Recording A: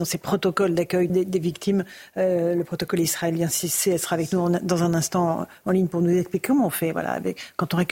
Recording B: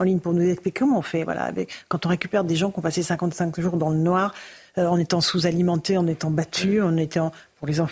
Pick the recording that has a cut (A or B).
A